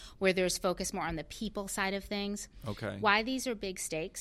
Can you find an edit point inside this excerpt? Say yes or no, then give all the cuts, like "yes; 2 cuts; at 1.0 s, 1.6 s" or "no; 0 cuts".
no; 0 cuts